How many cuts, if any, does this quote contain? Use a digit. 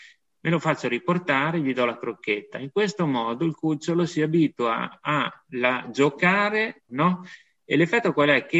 1